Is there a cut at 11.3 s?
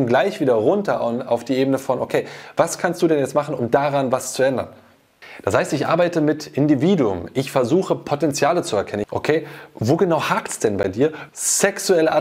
yes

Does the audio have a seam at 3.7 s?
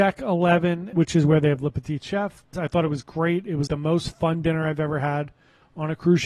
yes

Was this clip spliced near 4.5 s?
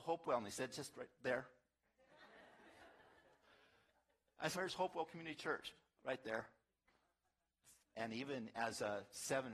yes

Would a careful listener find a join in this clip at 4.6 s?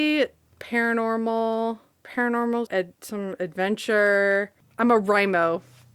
yes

